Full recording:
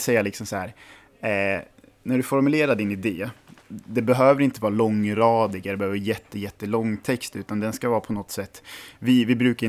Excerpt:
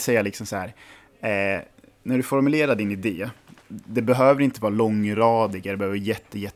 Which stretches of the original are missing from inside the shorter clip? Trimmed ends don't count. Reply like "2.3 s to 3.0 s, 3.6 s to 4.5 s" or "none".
none